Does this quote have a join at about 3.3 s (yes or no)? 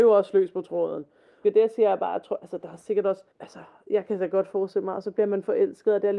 yes